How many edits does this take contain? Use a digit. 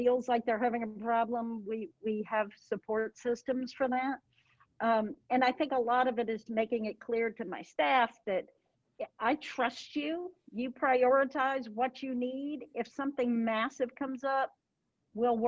1